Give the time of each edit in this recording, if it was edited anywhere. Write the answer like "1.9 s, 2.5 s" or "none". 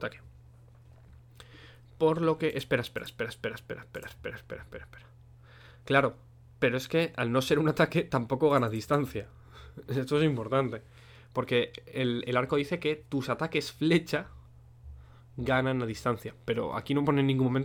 4.1 s

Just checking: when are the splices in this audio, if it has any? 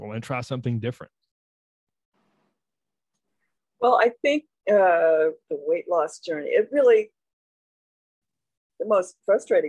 none

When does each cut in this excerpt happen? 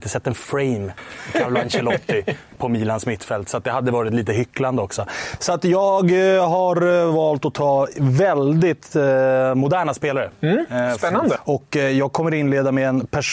11.4 s

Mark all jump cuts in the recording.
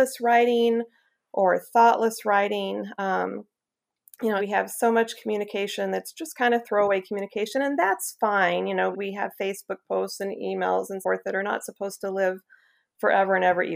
4.4 s, 8.9 s, 11.0 s

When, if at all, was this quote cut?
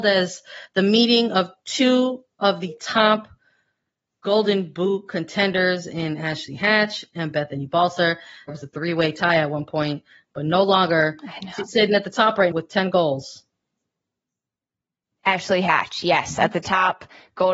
8.5 s, 12.5 s

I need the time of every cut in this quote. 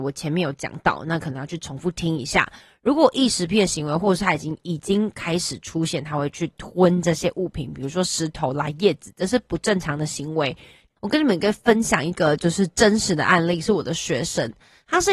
10.9 s

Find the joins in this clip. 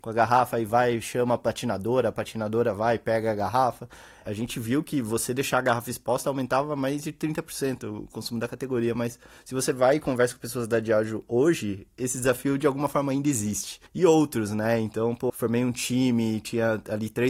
13.9 s, 15.3 s

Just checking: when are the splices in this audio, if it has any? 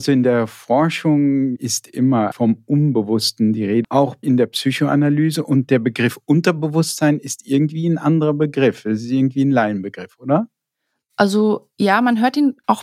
2.3 s, 3.8 s

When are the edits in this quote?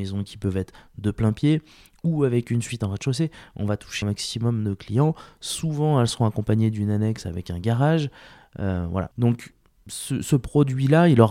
4.0 s

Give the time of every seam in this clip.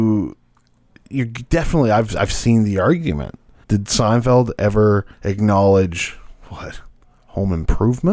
3.6 s, 5.1 s

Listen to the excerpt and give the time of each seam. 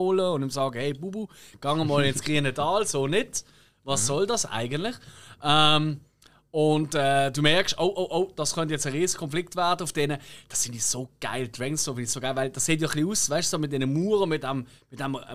none

